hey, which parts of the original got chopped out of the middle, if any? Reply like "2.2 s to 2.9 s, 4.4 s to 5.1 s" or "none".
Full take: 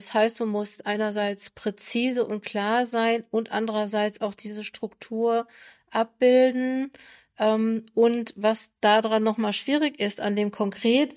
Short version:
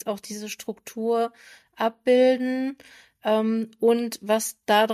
none